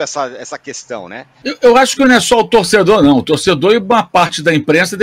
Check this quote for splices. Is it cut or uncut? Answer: cut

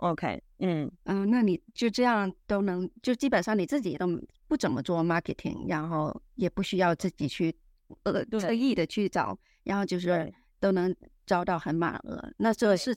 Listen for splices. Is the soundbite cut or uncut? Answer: uncut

